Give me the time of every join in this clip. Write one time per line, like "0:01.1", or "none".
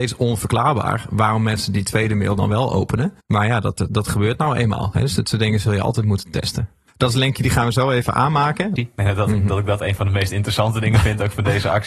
0:03.2
0:06.9
0:08.8